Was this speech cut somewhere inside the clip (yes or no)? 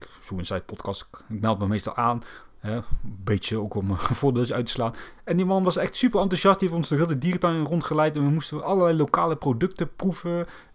no